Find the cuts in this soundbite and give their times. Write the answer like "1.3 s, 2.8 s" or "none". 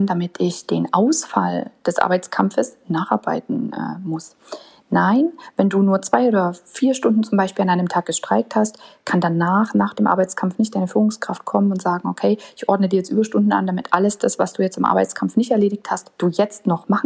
none